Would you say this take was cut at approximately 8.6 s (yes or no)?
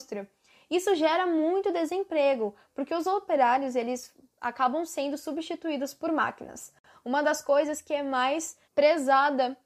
yes